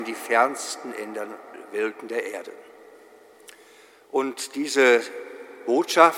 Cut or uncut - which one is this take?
uncut